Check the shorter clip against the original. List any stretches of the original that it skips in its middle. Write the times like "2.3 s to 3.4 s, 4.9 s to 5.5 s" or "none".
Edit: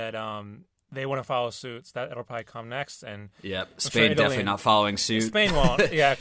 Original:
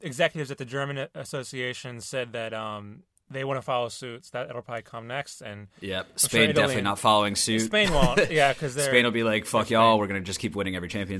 none